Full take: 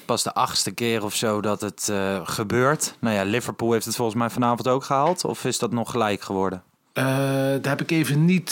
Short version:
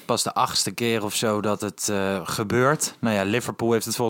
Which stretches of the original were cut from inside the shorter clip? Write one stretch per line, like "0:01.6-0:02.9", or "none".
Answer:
none